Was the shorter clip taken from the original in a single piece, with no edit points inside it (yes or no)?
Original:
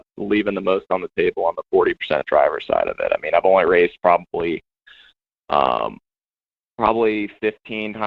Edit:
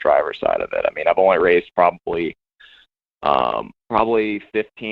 no